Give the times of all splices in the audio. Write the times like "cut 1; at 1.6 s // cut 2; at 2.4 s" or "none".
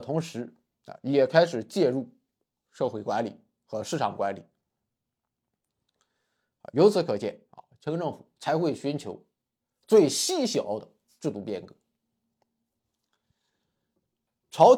cut 1; at 7.7 s